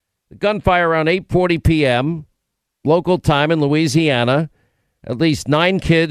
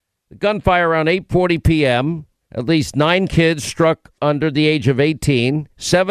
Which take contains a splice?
second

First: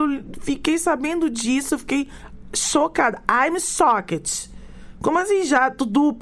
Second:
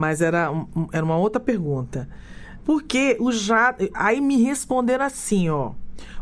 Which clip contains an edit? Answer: second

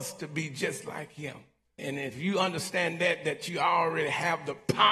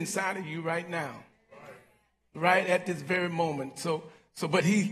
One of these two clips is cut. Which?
first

